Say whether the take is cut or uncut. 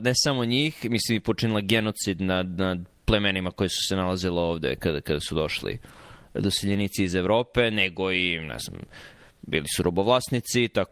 uncut